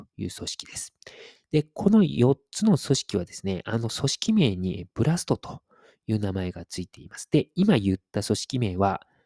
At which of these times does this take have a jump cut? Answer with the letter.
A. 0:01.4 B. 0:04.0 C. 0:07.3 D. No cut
A